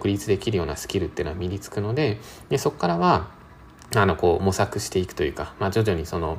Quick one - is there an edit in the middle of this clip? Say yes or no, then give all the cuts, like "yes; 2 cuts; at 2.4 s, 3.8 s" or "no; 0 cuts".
no; 0 cuts